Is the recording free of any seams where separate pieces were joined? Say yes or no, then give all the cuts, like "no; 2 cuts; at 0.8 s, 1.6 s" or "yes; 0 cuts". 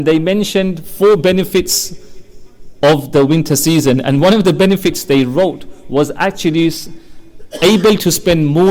yes; 0 cuts